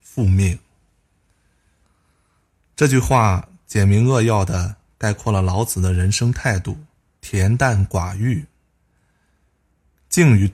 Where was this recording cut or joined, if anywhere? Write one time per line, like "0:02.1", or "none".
0:01.8
0:07.2